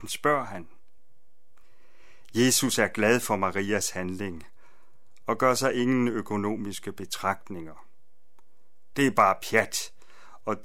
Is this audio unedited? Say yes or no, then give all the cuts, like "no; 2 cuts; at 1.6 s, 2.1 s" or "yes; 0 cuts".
no; 1 cut; at 8.9 s